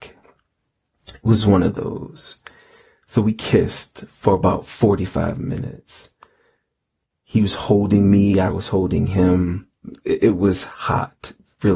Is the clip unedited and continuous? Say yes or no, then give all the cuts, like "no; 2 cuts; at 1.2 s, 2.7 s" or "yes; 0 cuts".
yes; 0 cuts